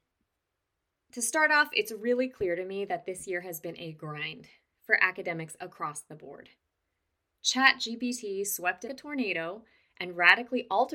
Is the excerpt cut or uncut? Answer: cut